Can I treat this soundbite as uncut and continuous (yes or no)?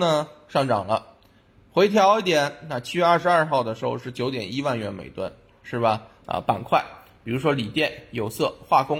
no